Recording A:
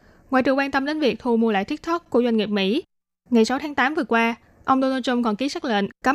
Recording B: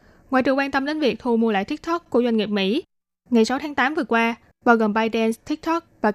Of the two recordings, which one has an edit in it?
B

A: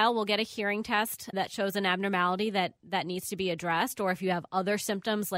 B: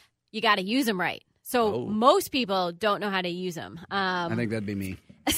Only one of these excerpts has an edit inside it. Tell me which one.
A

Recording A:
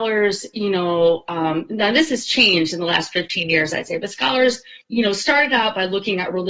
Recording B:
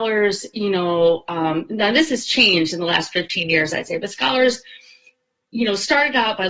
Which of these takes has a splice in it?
A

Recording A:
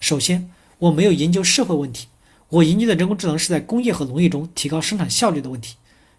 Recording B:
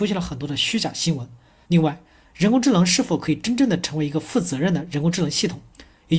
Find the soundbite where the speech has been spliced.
B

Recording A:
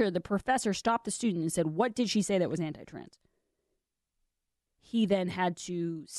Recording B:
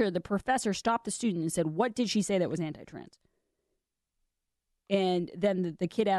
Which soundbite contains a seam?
A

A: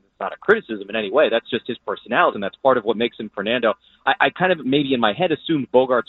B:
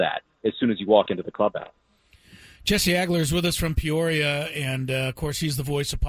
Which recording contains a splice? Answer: A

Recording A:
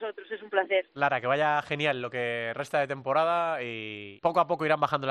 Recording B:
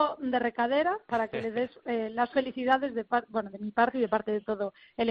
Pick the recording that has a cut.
A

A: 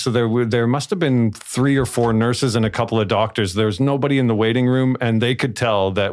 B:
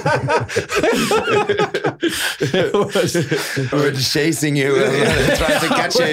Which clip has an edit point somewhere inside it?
B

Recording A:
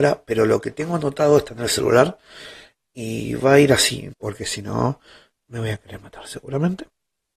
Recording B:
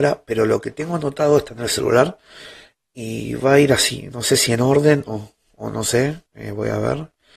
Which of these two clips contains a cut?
A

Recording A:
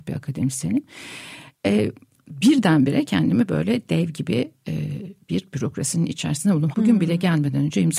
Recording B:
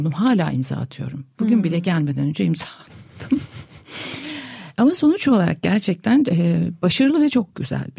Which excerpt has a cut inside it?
A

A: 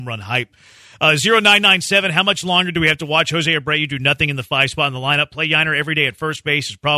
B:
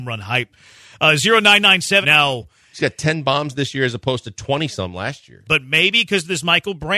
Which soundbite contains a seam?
B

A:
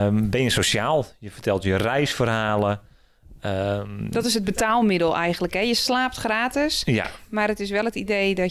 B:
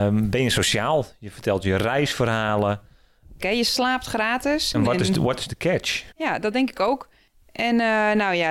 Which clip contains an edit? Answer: B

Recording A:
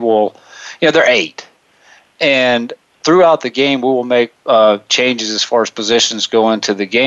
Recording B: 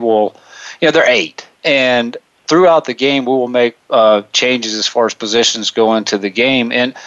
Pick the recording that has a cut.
B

